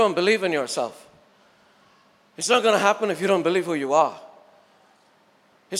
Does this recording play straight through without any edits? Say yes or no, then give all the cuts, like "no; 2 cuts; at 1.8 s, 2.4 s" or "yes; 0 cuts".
yes; 0 cuts